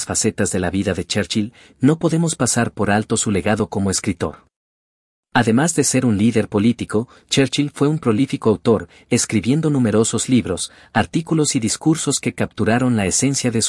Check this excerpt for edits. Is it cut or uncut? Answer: uncut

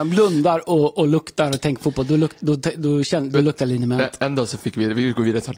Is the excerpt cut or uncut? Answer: uncut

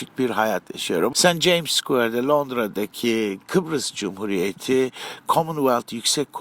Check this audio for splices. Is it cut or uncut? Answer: cut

